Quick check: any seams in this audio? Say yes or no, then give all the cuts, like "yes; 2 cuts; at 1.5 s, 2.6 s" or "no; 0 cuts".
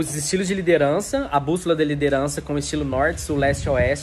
no; 0 cuts